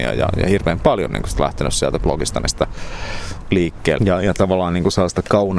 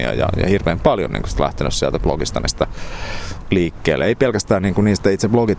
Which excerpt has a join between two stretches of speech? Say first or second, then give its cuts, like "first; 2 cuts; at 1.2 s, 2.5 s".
first; 1 cut; at 4.0 s